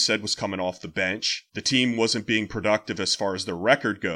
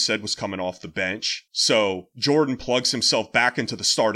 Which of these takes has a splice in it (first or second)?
second